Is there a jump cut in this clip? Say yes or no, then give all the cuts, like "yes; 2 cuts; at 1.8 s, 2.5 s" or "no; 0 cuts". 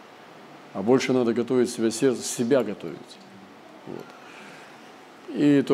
no; 0 cuts